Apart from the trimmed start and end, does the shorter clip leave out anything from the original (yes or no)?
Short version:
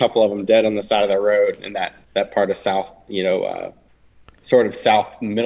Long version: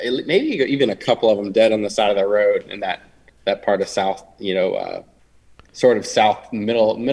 yes